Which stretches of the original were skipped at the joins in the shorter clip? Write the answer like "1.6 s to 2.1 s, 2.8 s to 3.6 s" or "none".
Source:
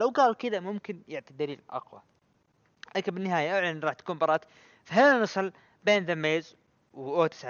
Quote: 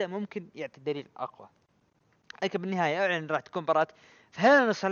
none